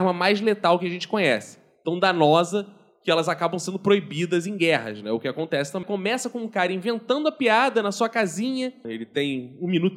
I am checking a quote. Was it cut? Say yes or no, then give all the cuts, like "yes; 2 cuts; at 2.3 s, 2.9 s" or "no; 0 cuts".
yes; 2 cuts; at 5.8 s, 8.8 s